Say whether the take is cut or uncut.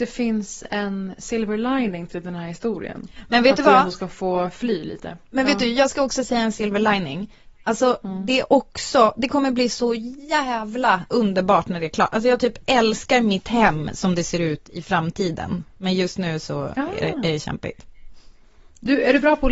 uncut